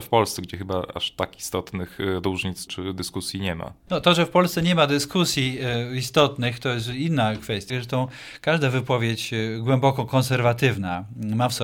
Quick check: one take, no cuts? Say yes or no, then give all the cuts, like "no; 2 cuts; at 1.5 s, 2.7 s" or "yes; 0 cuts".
no; 2 cuts; at 2.7 s, 7.7 s